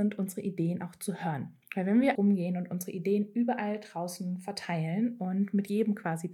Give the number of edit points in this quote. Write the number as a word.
one